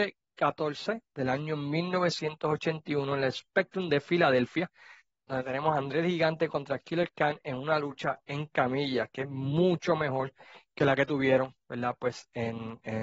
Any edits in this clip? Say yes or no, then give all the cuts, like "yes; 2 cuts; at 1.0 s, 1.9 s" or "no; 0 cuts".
no; 0 cuts